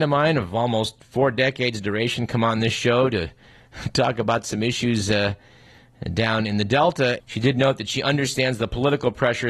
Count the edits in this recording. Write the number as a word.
one